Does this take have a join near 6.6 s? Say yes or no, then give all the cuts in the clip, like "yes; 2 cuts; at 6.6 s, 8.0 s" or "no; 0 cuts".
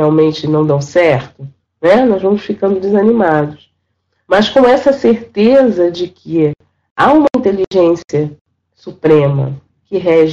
no; 1 cut; at 1.6 s